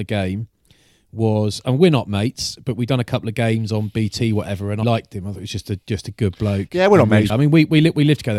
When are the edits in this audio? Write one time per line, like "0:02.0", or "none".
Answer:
0:04.8
0:07.3